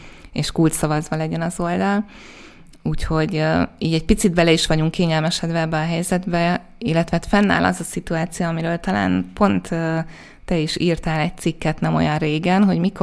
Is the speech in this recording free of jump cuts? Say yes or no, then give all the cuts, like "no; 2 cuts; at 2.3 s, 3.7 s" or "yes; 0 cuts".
yes; 0 cuts